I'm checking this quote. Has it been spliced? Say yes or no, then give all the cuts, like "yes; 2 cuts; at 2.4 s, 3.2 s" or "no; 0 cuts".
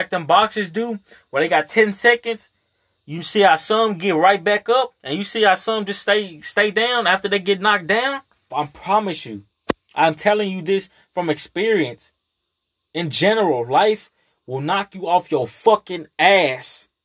yes; 1 cut; at 8.5 s